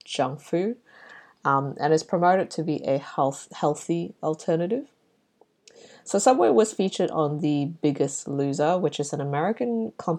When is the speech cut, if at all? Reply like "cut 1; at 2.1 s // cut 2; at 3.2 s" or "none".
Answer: none